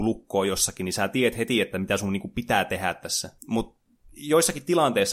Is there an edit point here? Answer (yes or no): yes